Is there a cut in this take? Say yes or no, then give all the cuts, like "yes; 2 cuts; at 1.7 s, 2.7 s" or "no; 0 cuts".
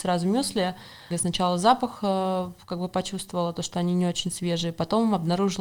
yes; 1 cut; at 1.1 s